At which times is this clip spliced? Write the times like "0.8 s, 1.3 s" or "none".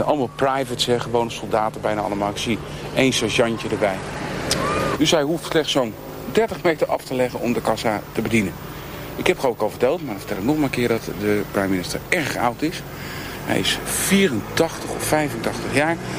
5.0 s